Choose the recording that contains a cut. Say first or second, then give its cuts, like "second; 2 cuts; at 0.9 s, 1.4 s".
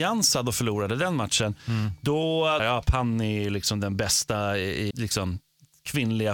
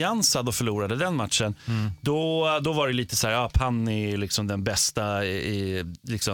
first; 2 cuts; at 2.6 s, 4.9 s